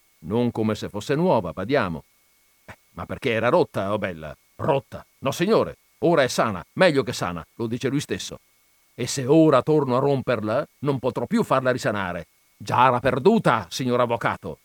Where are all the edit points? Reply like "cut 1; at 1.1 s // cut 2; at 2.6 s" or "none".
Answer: cut 1; at 2.5 s // cut 2; at 4.4 s